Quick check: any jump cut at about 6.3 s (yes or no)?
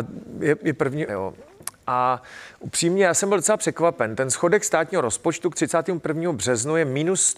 no